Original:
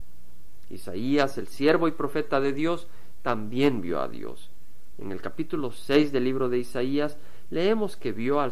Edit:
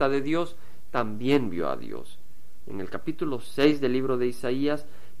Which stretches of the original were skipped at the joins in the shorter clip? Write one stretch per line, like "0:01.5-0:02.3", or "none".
none